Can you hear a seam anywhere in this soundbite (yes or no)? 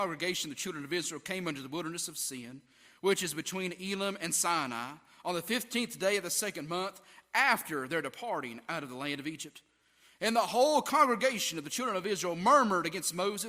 no